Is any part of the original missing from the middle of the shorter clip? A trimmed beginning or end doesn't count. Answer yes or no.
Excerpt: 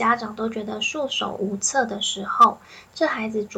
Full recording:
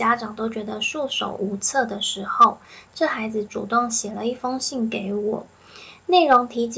no